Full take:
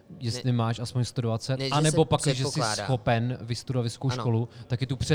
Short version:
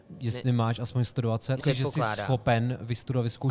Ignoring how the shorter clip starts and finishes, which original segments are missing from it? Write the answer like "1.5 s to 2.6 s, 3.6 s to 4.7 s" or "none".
1.6 s to 2.2 s